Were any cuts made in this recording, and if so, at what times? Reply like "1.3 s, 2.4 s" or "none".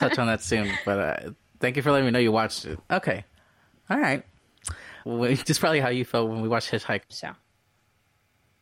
5.0 s, 7.0 s